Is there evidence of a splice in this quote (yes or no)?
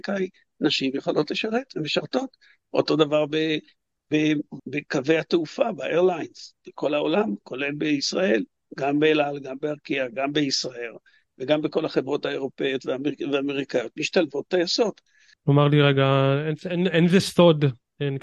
yes